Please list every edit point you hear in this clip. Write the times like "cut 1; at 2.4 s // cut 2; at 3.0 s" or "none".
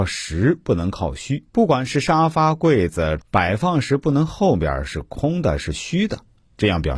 cut 1; at 1.5 s // cut 2; at 3.2 s